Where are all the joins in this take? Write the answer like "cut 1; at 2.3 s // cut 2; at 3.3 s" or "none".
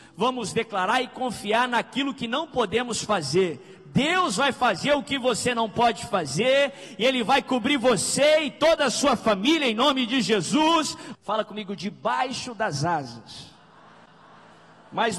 cut 1; at 11.1 s